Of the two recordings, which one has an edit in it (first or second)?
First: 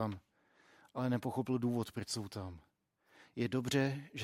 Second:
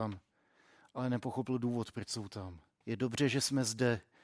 second